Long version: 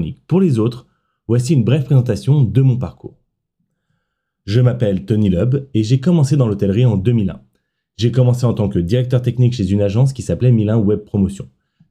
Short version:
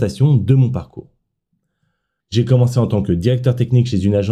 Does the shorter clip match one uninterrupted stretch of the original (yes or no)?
no